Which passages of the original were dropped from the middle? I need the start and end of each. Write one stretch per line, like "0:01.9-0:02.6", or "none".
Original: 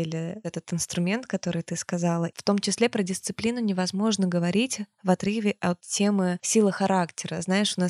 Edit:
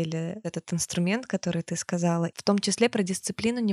none